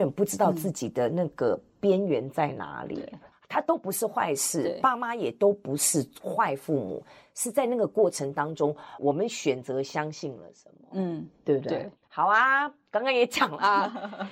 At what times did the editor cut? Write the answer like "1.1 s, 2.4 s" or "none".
3.3 s, 9.0 s, 12.0 s